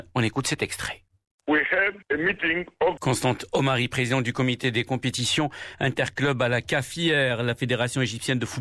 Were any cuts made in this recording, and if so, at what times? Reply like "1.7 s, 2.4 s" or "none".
3.0 s

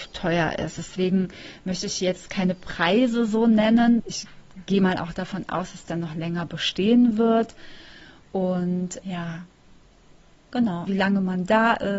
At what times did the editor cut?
4.0 s, 10.9 s

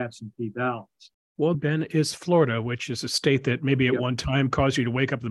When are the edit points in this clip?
1.5 s

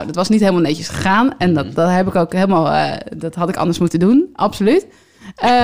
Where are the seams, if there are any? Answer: 1.8 s

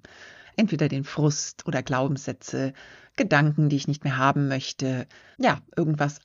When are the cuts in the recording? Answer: 5.3 s

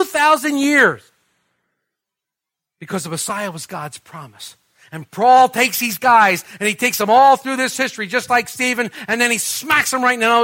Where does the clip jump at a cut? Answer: none

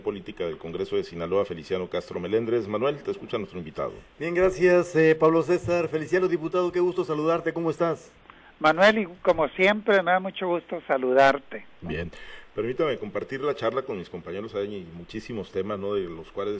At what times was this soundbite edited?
11.8 s

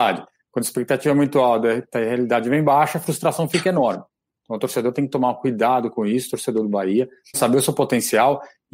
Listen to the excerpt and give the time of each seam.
7.3 s

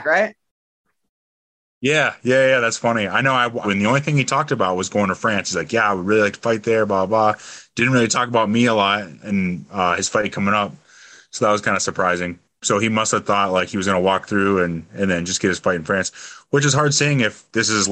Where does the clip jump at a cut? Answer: 3.6 s

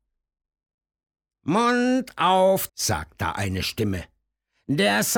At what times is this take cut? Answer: 2.7 s

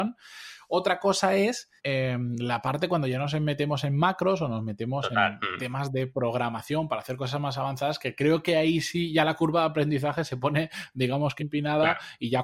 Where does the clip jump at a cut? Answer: 1.8 s, 11.4 s

